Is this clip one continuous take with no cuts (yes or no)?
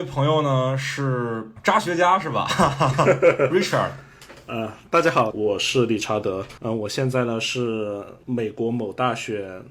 no